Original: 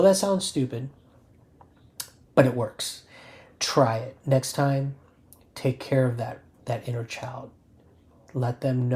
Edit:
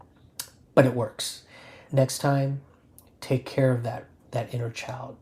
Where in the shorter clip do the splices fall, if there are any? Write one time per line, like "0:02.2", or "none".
0:01.9